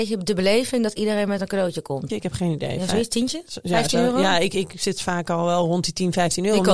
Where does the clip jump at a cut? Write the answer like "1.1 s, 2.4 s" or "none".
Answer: 2.1 s